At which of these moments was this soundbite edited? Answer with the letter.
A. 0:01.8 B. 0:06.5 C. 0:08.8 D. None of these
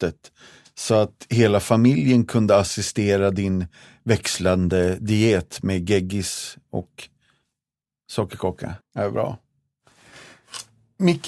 C